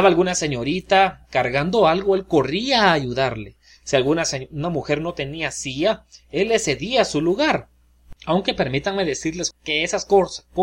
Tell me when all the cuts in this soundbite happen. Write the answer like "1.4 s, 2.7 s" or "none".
8.2 s, 9.5 s

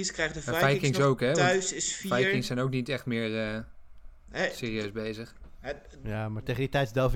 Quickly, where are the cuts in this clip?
none

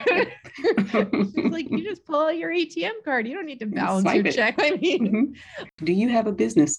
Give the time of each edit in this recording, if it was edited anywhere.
4.6 s, 5.8 s

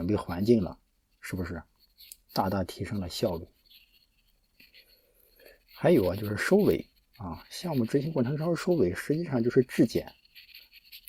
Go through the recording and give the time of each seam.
none

